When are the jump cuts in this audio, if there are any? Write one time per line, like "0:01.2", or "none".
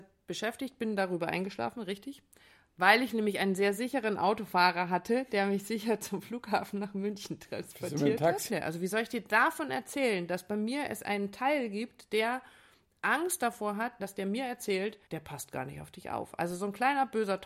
0:08.5
0:14.0
0:15.1

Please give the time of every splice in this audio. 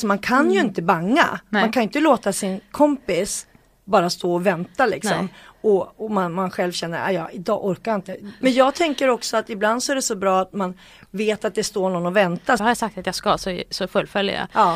0:08.4
0:12.6

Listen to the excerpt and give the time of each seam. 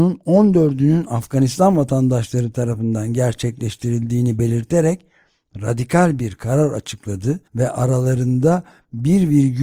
0:07.5

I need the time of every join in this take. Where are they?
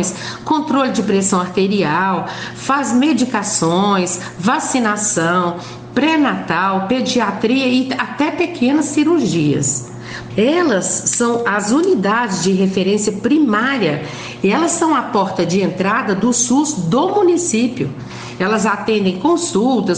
0:10.3

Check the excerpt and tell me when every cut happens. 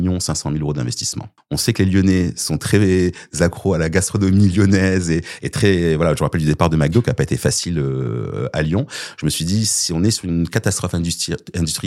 0:01.4

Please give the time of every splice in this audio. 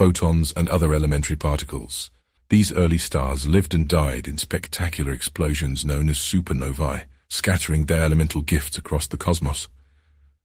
0:02.4

